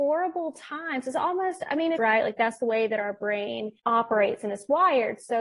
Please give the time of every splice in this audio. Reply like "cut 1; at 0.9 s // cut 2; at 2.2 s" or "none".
cut 1; at 2.0 s